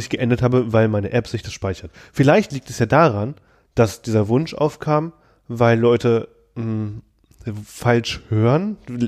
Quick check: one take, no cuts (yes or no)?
yes